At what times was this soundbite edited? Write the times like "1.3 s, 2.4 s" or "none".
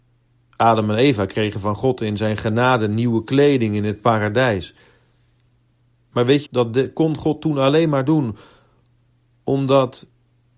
6.5 s